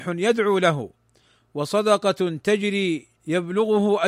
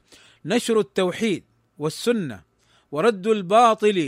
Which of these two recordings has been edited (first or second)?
first